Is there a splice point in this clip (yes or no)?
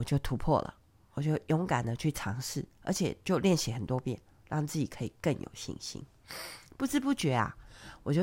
no